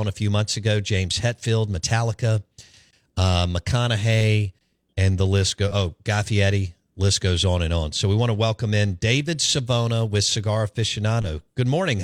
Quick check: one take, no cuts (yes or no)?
yes